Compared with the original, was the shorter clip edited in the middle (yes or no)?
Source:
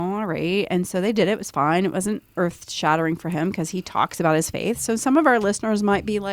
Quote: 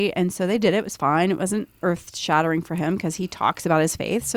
no